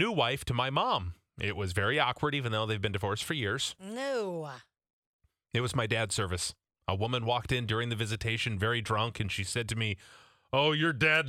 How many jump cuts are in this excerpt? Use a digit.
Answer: 1